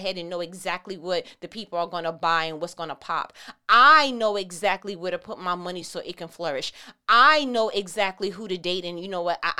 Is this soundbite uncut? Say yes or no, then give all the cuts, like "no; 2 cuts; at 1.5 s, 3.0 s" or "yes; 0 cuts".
yes; 0 cuts